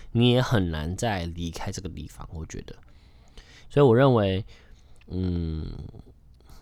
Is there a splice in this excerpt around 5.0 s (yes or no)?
yes